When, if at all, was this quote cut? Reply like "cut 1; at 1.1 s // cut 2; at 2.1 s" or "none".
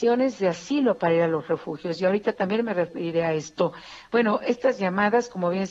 none